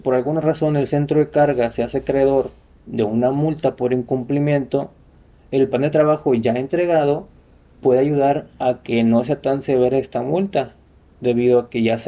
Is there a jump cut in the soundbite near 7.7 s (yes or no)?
no